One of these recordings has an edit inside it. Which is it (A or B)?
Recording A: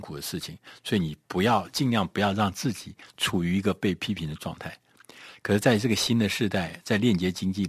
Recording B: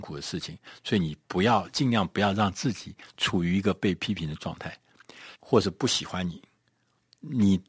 B